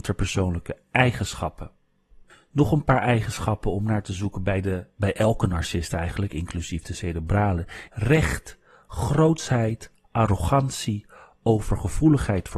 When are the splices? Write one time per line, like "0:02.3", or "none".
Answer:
0:07.9